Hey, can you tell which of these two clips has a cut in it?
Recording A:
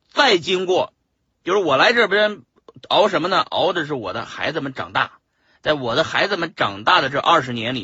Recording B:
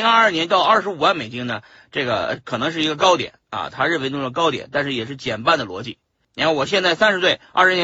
B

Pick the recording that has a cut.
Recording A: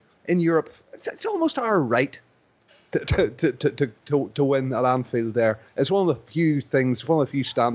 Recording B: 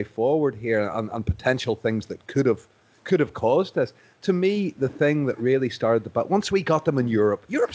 A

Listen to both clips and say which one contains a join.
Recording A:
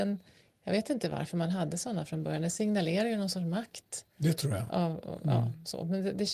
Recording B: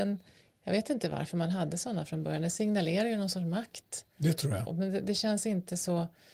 B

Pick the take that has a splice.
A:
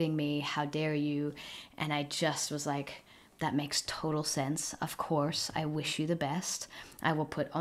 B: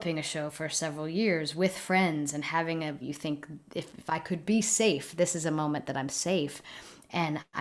B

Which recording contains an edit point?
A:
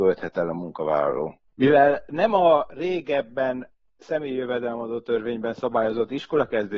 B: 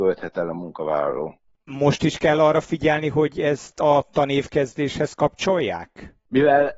A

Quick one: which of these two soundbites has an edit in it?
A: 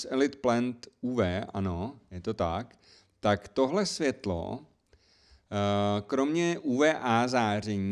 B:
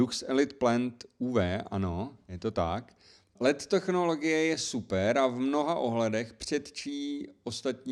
B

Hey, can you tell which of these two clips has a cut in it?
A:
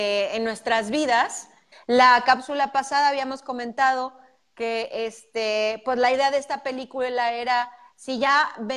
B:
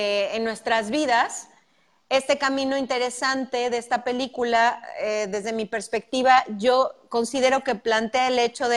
A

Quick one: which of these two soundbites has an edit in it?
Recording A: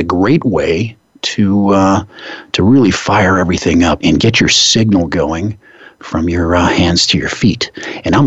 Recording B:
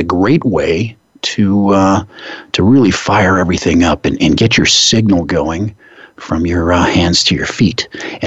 A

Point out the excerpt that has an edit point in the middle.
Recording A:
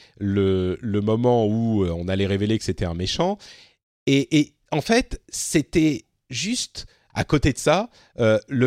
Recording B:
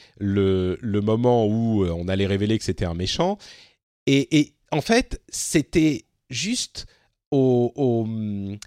A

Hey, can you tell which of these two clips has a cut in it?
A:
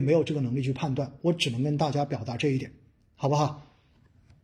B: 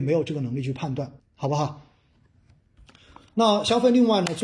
B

